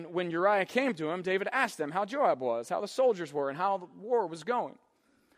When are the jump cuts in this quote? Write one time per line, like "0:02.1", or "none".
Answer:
none